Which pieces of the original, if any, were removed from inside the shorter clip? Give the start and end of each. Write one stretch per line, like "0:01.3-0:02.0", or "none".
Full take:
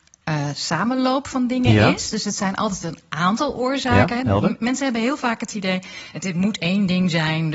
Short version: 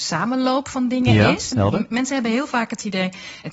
0:02.1-0:04.2